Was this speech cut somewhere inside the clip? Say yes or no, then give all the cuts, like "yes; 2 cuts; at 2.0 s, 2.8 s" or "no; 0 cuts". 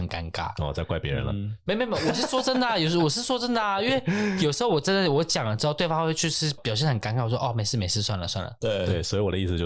yes; 1 cut; at 6.6 s